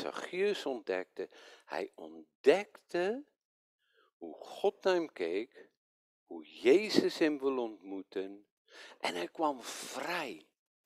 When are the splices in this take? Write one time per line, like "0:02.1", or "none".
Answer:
none